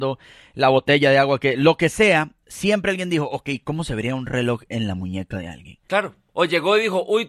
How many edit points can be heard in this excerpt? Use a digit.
0